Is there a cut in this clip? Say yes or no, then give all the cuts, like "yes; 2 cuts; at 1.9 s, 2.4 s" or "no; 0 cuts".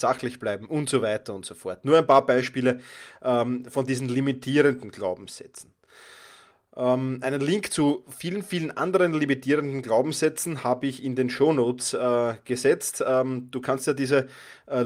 no; 0 cuts